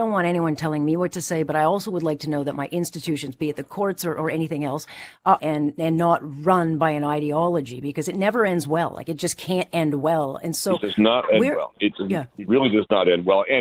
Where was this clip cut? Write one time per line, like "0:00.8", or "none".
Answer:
0:05.4